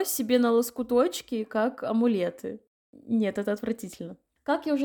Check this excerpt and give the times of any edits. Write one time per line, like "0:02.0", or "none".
0:02.8

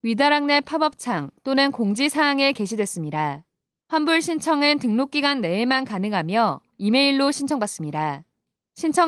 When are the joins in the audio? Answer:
0:03.8

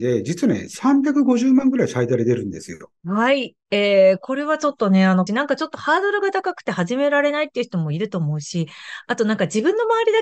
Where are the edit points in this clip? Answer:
0:03.0
0:05.3

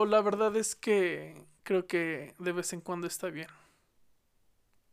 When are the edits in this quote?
0:01.6

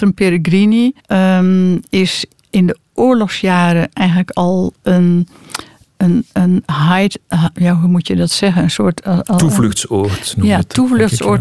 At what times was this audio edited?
0:01.0

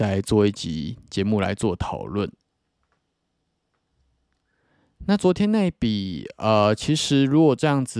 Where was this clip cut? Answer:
none

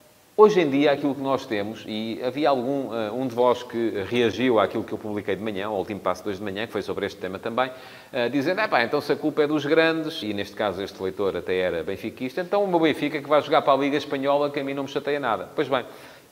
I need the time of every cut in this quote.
0:10.2

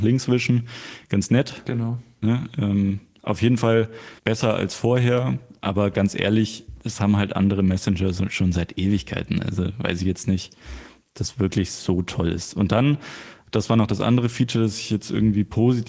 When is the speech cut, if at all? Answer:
0:04.2

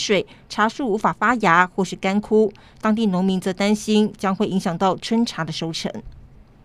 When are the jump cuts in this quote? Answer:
none

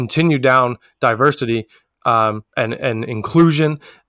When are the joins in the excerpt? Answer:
0:02.5

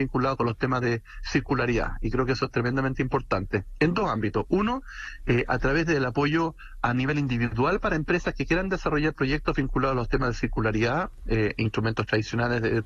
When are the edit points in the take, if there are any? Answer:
none

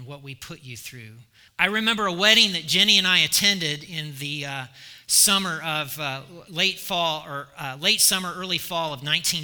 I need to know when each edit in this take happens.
0:01.5

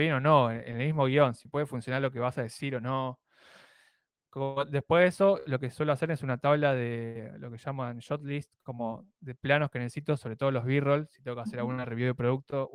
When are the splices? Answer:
none

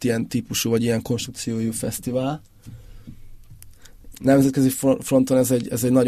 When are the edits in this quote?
0:04.1

